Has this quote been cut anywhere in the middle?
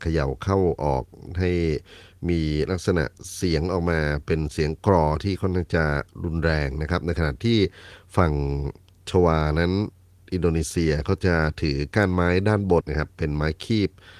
yes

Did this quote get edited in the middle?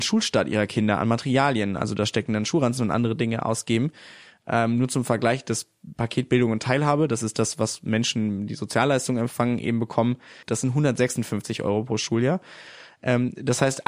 yes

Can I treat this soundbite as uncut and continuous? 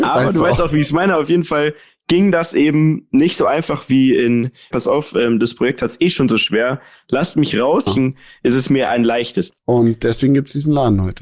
no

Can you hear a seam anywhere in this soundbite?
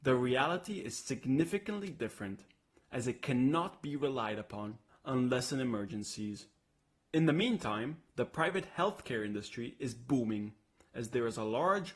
yes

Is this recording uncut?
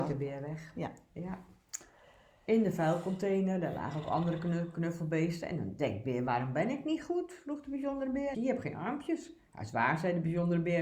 no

